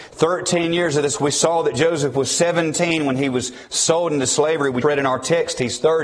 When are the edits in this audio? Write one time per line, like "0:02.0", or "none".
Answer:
0:04.8